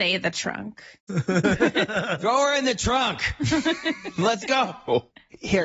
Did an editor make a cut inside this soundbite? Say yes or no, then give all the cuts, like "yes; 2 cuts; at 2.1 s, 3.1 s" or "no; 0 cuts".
yes; 1 cut; at 1.1 s